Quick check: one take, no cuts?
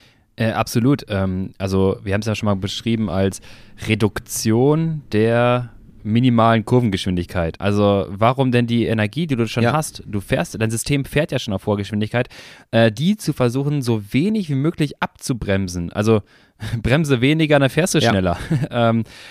no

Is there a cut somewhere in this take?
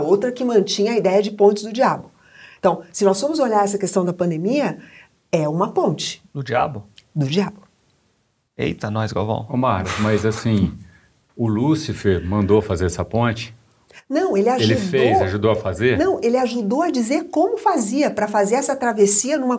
no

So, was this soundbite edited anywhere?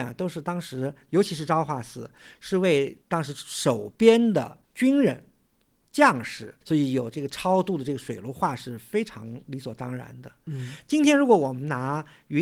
yes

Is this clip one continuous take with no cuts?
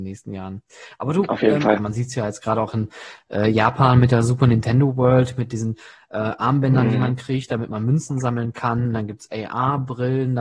no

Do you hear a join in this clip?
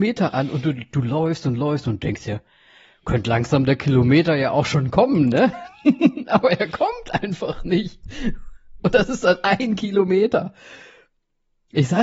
no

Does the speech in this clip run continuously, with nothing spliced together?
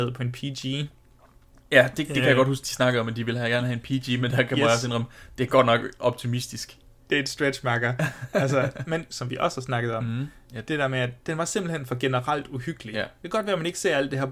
no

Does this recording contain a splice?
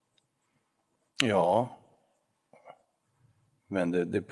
no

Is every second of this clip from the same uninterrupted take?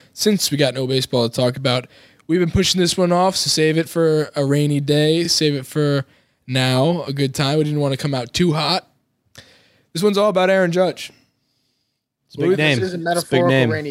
yes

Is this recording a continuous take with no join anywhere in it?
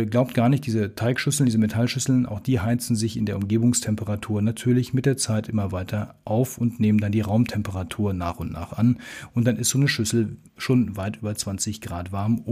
yes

